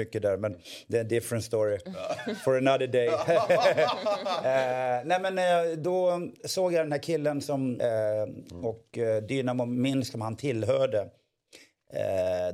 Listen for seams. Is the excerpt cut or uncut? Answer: cut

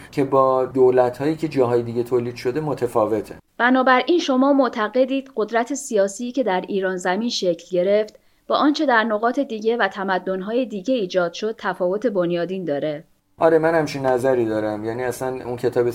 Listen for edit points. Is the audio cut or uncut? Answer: cut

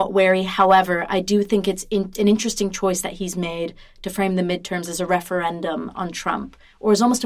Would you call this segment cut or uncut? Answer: uncut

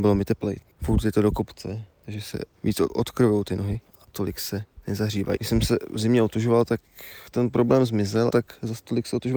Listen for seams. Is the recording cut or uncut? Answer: cut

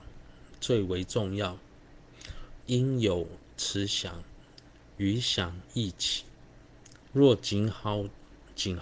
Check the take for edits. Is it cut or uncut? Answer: cut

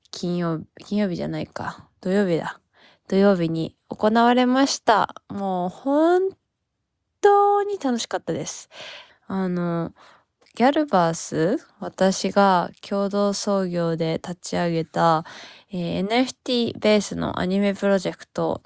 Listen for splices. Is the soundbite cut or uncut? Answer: cut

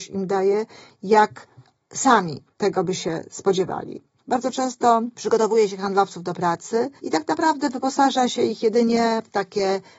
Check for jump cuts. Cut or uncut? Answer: cut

